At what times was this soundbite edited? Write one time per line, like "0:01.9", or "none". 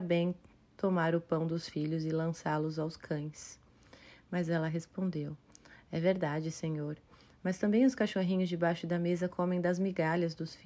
none